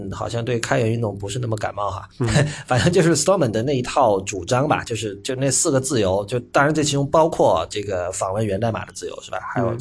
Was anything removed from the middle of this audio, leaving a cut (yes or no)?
no